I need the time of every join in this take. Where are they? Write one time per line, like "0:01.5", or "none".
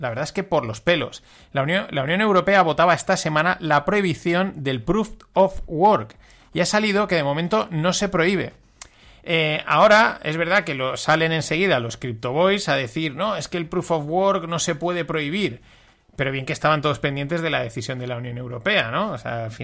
none